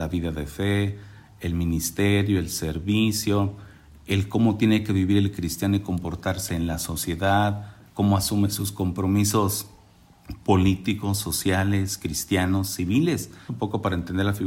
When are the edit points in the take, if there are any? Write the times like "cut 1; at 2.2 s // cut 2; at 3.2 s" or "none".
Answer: cut 1; at 13.5 s